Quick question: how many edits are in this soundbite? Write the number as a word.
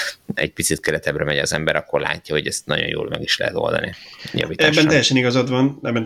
zero